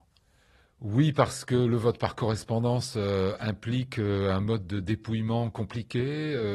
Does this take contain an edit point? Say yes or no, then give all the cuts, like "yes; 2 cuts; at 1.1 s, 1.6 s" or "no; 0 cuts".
no; 0 cuts